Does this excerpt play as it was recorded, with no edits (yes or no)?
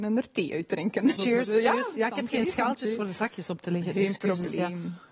no